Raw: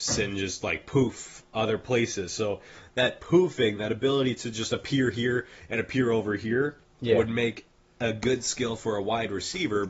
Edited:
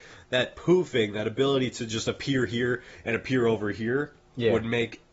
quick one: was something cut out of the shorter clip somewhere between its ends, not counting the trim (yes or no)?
no